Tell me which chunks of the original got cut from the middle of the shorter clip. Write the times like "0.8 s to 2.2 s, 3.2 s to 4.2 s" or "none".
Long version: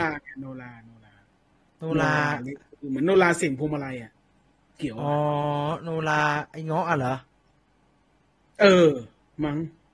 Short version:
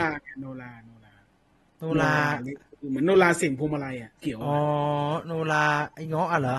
4.1 s to 4.7 s